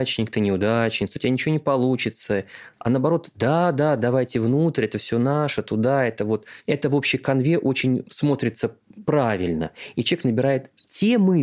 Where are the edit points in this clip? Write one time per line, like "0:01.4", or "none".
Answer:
none